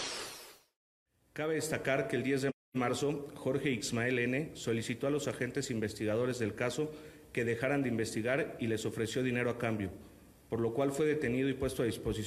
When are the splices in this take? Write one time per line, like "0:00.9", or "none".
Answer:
none